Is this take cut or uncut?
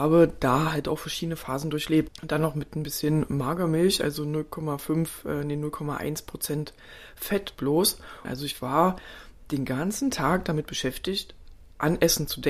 cut